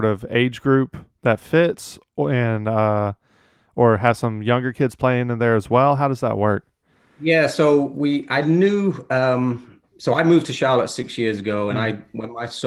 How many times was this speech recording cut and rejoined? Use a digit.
0